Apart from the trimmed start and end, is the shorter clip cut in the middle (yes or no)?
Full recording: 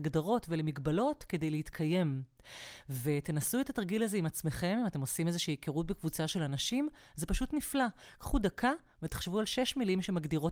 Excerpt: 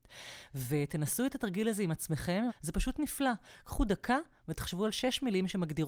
yes